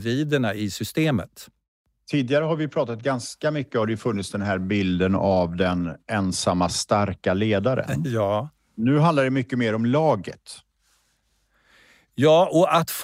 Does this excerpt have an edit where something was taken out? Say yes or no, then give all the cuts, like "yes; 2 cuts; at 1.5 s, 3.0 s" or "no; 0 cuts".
no; 0 cuts